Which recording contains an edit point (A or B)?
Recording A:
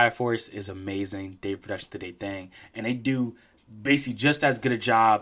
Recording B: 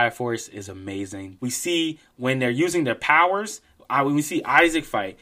B